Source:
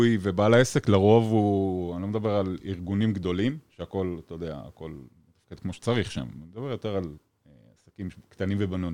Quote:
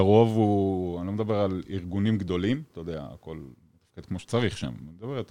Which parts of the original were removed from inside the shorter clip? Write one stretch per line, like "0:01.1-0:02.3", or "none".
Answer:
0:03.7-0:04.2